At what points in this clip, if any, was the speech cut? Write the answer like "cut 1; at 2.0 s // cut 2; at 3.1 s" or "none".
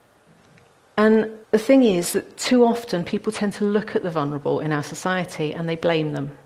cut 1; at 1.4 s